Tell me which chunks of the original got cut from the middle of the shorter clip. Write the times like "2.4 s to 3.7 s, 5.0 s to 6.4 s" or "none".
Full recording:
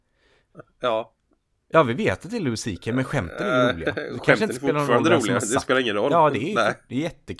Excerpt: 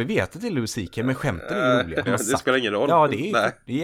3.9 s to 5.3 s